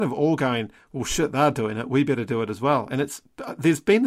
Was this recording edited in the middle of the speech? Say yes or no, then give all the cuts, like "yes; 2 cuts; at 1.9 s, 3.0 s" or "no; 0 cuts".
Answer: no; 0 cuts